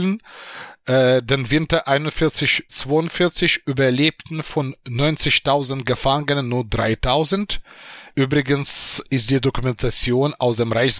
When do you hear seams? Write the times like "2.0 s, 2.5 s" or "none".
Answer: 2.7 s, 8.1 s